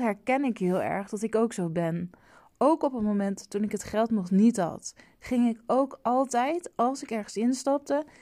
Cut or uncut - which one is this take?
uncut